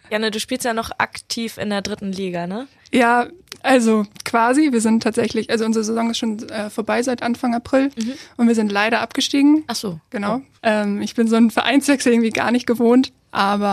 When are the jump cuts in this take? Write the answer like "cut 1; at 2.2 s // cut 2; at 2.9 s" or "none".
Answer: cut 1; at 10.6 s